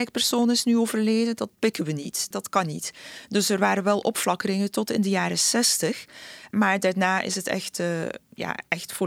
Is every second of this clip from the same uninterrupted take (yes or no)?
yes